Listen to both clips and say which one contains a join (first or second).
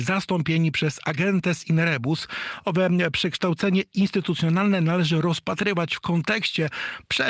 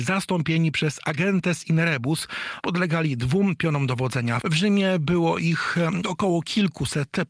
second